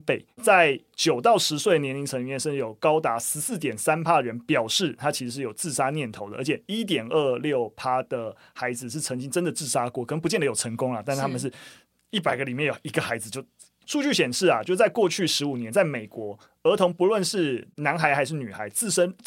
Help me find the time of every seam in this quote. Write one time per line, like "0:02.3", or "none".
0:13.8